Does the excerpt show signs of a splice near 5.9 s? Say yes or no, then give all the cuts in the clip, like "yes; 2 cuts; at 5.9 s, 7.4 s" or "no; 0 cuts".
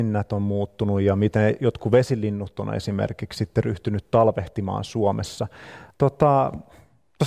yes; 1 cut; at 5.9 s